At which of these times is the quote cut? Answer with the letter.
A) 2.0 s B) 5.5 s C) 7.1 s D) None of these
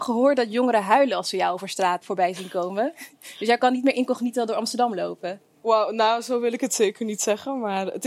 A